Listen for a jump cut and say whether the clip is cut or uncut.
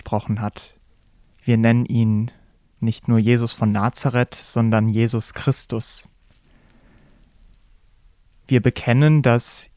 cut